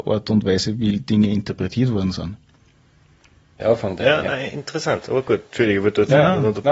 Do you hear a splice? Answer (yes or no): yes